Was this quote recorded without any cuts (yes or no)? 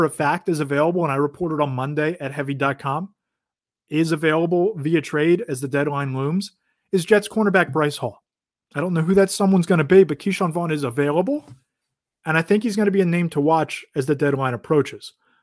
no